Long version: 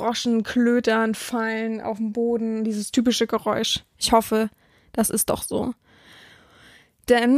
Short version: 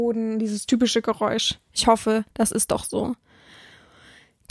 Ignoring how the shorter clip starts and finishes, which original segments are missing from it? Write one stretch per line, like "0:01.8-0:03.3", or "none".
0:04.6-0:04.9